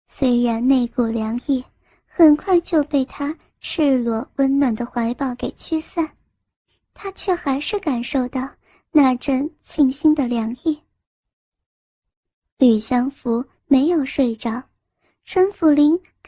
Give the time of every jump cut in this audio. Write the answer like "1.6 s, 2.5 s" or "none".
none